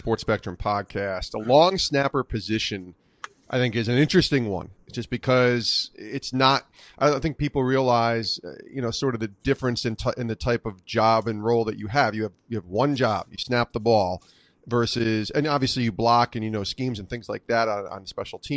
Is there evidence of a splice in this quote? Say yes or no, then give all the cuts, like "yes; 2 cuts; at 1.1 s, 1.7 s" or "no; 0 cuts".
no; 0 cuts